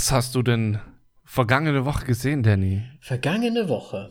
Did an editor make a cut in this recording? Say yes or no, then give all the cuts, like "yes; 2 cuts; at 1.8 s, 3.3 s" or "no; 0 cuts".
no; 0 cuts